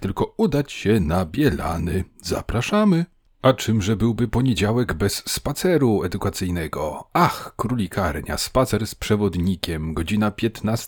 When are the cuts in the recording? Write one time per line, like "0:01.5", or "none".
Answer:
none